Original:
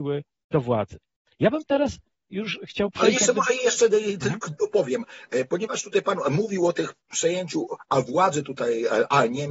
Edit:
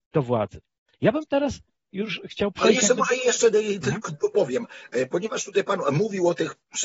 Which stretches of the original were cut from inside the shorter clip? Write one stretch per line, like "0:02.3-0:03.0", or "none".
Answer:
none